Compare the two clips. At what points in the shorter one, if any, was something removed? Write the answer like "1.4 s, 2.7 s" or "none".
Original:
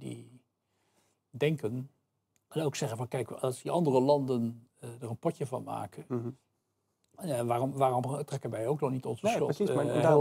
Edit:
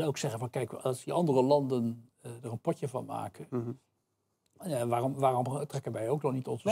none